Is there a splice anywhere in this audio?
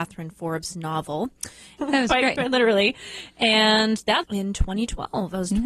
yes; 2 cuts; at 1.8 s, 4.2 s

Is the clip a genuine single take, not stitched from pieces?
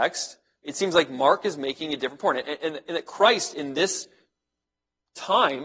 yes; 0 cuts

